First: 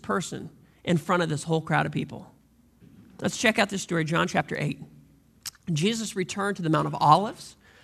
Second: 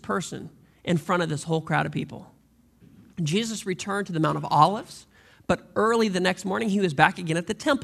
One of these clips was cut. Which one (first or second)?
second